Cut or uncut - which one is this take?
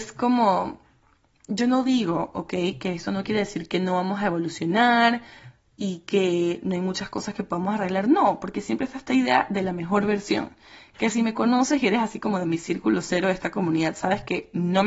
uncut